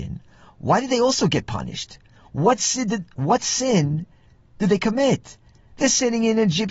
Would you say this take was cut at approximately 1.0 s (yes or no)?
no